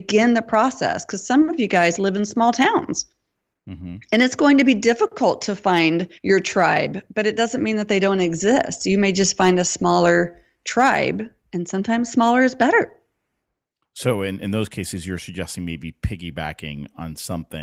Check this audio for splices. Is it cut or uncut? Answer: cut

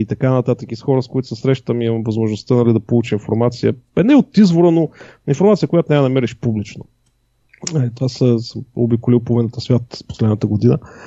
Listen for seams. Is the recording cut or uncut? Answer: uncut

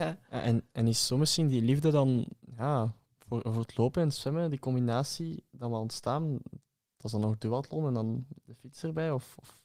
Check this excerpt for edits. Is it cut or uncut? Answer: uncut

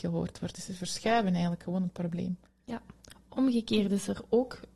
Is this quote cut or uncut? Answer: uncut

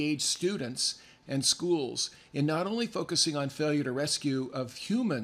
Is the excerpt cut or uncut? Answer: cut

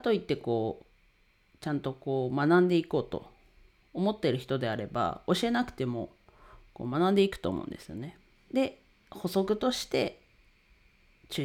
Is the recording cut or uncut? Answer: cut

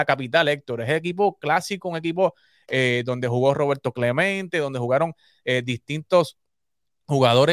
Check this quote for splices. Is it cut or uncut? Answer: uncut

